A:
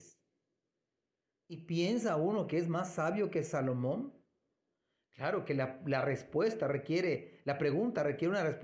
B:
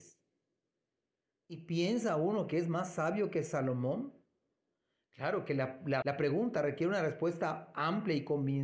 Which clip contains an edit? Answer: B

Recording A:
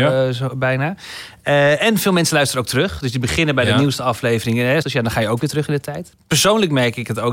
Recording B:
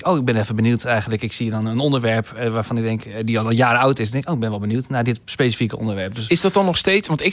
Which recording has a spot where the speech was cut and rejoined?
A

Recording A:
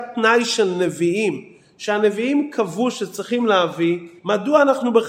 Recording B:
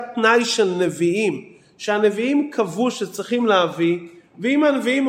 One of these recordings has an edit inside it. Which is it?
A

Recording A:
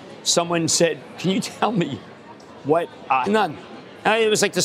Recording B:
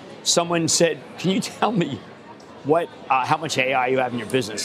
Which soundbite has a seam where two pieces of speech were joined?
A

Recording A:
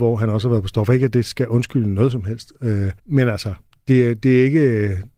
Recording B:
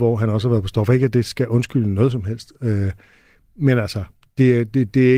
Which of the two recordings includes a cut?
A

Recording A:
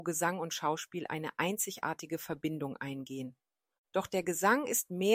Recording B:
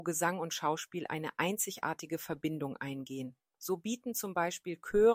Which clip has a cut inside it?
B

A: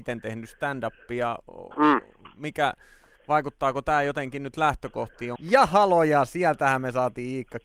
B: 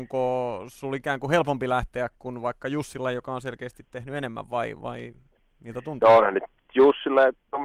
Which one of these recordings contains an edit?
A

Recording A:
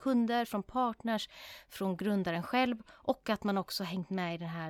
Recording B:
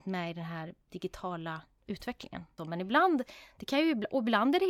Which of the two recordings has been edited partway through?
B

